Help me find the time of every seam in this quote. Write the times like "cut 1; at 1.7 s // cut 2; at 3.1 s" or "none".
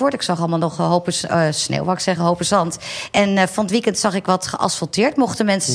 none